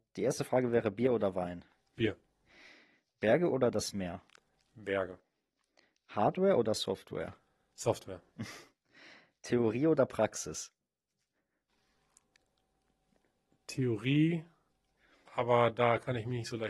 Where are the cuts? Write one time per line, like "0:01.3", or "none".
none

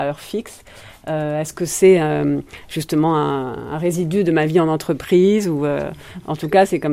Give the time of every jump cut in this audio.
none

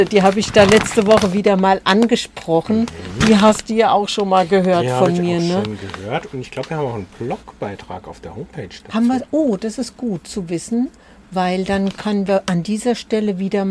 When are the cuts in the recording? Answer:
none

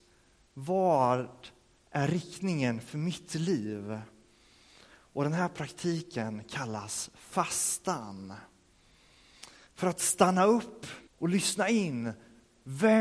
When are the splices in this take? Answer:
0:09.7
0:11.1

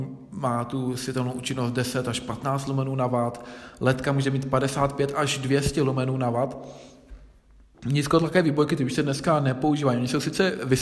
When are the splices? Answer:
0:07.7

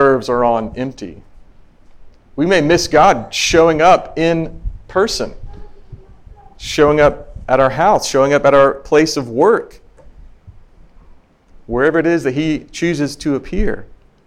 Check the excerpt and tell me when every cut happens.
none

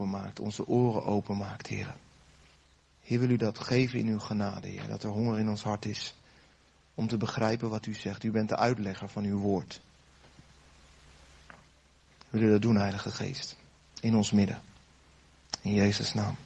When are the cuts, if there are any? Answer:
0:02.9

